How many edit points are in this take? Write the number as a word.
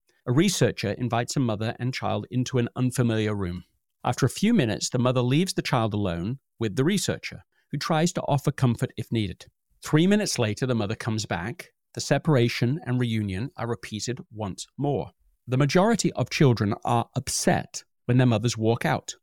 zero